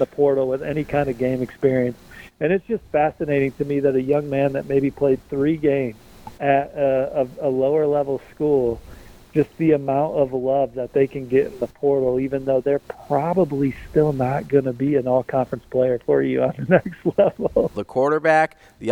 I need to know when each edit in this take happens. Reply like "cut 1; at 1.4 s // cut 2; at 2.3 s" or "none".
cut 1; at 6.4 s // cut 2; at 17.7 s